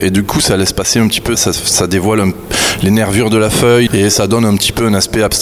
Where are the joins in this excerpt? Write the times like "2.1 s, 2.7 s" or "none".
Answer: 1.3 s, 3.9 s